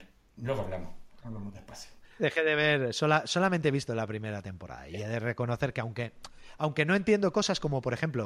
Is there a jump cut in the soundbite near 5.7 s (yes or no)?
no